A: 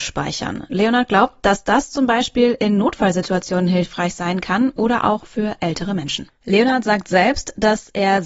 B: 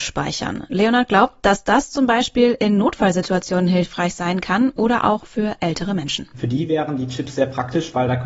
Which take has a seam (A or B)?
A